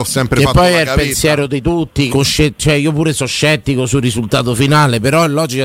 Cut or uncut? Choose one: cut